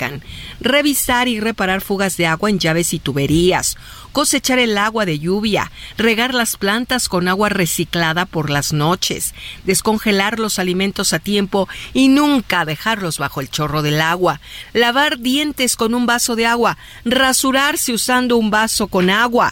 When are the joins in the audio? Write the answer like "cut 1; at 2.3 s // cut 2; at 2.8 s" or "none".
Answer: none